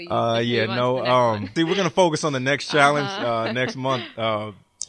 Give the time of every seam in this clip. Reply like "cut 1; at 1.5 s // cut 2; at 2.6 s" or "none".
cut 1; at 1.6 s